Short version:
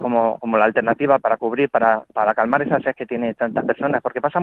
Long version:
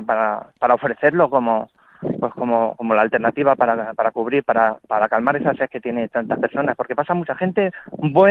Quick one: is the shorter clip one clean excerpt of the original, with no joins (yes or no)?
no